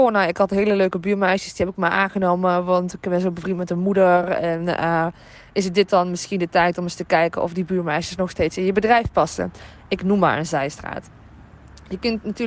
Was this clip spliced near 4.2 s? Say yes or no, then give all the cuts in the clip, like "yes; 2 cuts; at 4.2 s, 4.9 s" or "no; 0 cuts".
no; 0 cuts